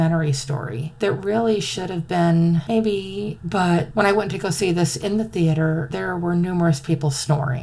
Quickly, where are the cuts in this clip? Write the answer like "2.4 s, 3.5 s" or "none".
3.4 s